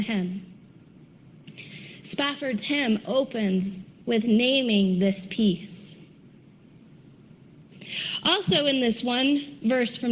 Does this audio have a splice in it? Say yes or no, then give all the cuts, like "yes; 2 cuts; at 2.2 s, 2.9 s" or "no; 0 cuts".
no; 0 cuts